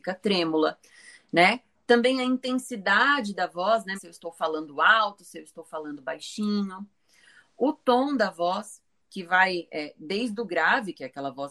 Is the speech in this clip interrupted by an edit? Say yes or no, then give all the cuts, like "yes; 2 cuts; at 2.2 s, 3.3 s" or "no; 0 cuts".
yes; 1 cut; at 3.9 s